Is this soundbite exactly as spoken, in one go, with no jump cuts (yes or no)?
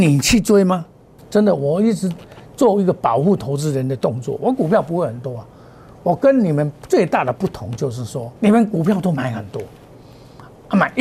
no